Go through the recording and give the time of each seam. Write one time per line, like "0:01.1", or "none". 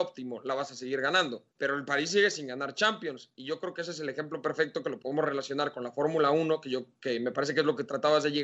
0:01.5